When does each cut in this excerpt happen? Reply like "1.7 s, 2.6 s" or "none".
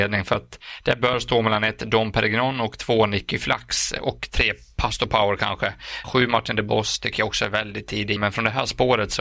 6.0 s, 8.2 s